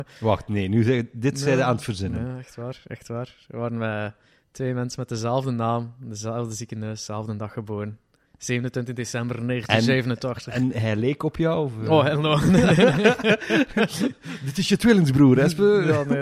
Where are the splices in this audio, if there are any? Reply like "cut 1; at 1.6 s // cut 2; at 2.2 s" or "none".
none